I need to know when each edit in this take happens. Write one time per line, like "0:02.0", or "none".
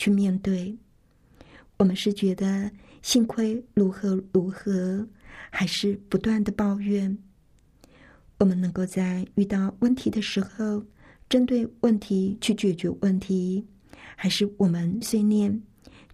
0:15.0